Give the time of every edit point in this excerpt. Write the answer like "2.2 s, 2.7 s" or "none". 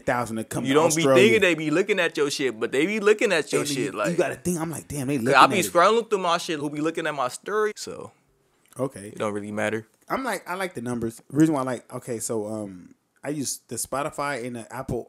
6.6 s, 7.7 s